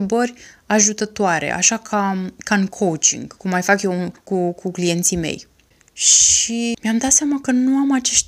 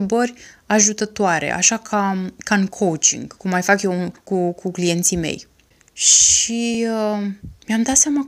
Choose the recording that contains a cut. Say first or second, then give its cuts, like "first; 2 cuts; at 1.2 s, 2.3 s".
first; 1 cut; at 6.7 s